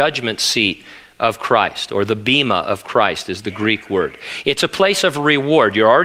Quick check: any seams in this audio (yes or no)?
no